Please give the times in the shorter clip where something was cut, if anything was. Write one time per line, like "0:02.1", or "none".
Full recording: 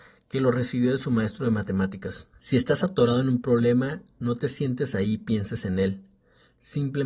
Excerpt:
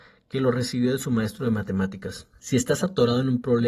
none